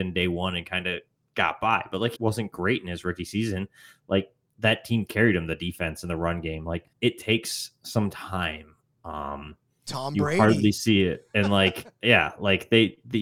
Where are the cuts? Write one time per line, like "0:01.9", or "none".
0:02.2
0:06.9